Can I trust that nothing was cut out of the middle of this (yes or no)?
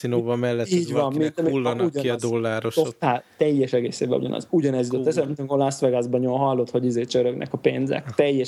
yes